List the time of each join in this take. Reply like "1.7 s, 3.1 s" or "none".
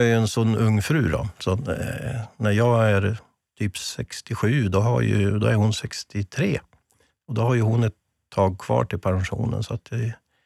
none